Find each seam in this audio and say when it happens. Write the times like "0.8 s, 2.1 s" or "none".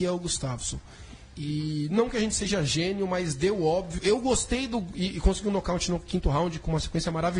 4.0 s